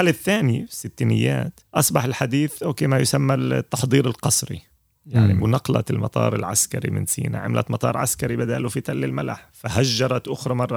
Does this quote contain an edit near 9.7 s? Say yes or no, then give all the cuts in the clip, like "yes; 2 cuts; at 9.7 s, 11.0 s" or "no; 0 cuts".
no; 2 cuts; at 1.6 s, 5.4 s